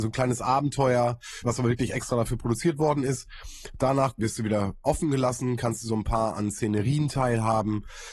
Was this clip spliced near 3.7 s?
no; 1 cut; at 1.4 s

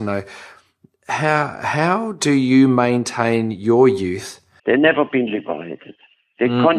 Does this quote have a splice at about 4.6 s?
yes; 1 cut; at 4.6 s

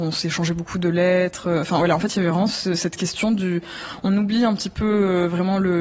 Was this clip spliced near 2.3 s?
no; 0 cuts

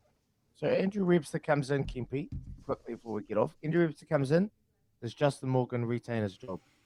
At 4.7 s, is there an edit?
no; 1 cut; at 2.6 s

